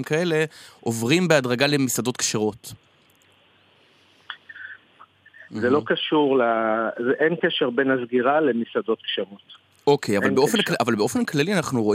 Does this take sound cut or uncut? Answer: cut